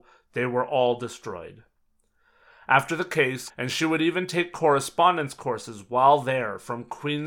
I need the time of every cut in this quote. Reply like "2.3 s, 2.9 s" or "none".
3.5 s